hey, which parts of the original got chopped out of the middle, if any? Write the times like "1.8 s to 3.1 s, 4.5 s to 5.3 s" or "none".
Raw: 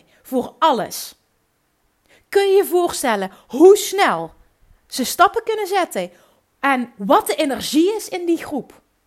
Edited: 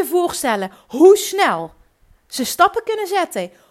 none